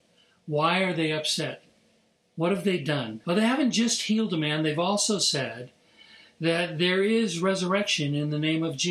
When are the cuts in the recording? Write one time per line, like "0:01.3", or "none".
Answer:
0:03.2